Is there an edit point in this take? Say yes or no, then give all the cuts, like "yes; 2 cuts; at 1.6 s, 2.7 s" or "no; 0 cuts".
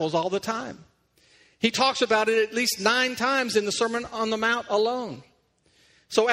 no; 0 cuts